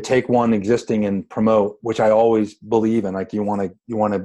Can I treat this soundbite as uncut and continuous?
yes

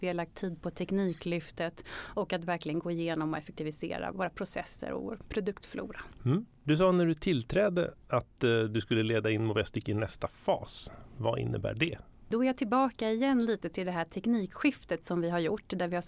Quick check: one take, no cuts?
no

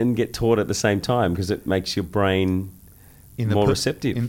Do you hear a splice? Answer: no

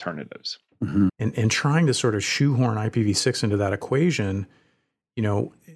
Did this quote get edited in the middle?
yes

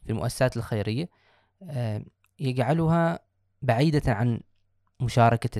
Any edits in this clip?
no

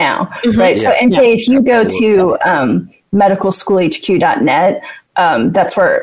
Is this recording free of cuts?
yes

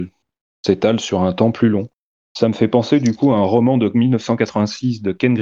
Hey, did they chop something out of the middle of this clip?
no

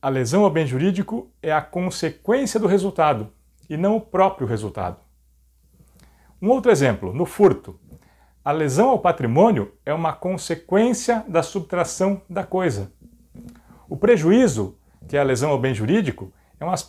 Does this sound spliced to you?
no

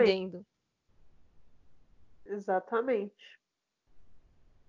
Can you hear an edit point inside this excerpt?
no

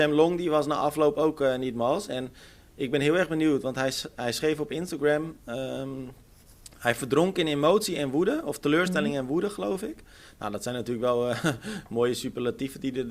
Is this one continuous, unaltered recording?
yes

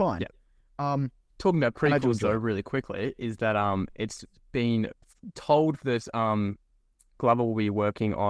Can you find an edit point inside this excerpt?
no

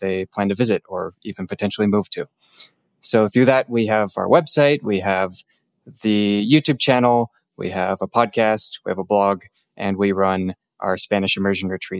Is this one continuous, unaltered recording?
yes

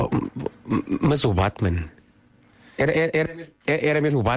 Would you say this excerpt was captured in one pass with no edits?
yes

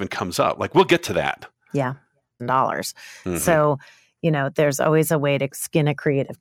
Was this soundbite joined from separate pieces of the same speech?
yes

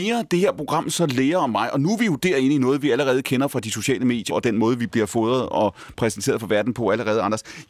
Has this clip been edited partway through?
yes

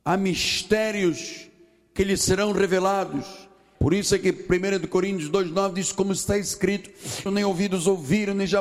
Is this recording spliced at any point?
yes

